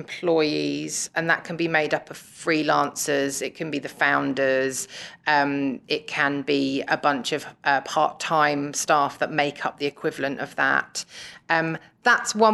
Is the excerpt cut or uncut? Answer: uncut